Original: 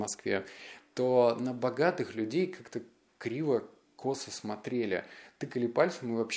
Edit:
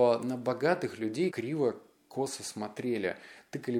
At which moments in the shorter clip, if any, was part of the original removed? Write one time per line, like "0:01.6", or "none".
0:01.3